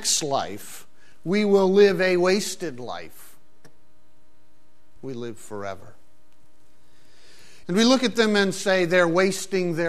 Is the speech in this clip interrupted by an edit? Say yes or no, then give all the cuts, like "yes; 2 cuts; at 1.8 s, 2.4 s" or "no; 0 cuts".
yes; 2 cuts; at 5.0 s, 7.6 s